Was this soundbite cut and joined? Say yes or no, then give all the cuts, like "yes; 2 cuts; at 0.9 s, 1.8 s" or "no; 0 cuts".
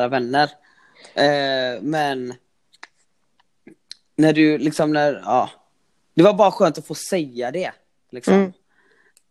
no; 0 cuts